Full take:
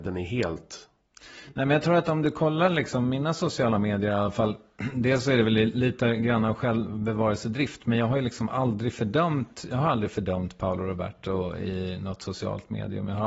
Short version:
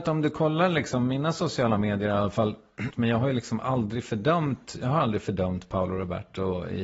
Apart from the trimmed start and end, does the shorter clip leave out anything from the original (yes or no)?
yes